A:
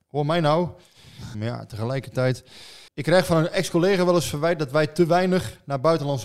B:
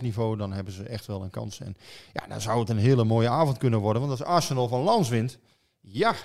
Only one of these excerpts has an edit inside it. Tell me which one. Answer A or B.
A